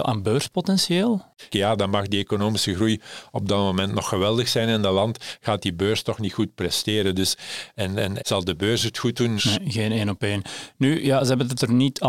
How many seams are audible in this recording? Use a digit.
3